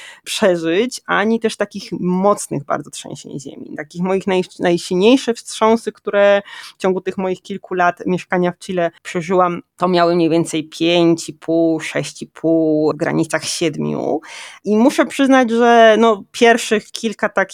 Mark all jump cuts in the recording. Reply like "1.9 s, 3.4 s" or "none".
9.0 s